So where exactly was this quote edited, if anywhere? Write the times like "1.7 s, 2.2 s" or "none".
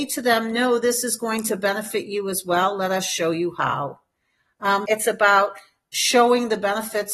4.8 s